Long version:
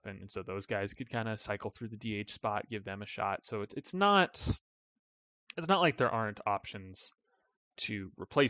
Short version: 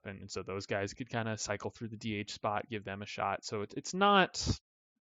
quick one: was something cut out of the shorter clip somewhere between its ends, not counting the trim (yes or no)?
no